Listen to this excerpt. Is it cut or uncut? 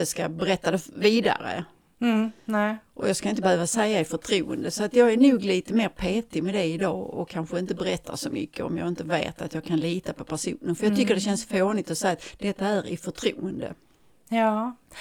uncut